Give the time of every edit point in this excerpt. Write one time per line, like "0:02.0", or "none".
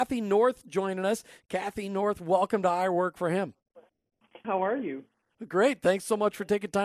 0:01.4
0:04.4